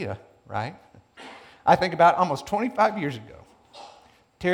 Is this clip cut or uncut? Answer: uncut